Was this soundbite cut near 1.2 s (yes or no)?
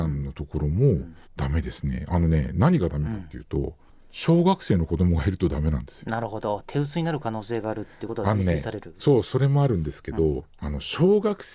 yes